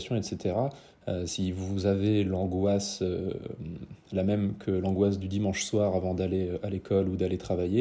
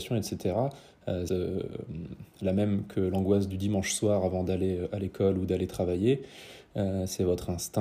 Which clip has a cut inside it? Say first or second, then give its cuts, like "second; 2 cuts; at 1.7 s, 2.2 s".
second; 1 cut; at 1.3 s